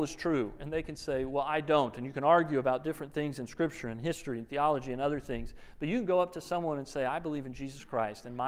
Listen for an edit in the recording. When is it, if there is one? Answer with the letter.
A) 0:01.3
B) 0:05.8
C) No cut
C